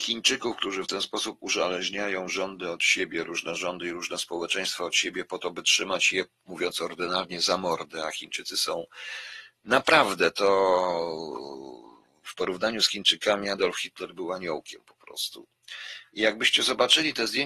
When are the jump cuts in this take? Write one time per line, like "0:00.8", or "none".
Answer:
none